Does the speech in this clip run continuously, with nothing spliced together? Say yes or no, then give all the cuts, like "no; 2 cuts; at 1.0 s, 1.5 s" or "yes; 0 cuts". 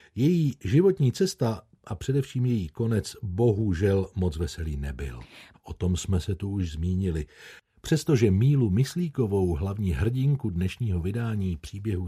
no; 2 cuts; at 5.5 s, 7.6 s